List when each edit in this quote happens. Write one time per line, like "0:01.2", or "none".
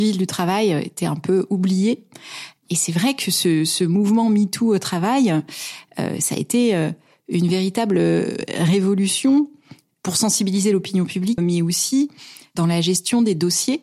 0:11.4